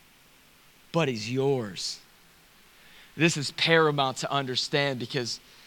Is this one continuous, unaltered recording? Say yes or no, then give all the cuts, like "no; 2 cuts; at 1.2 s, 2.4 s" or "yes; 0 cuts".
yes; 0 cuts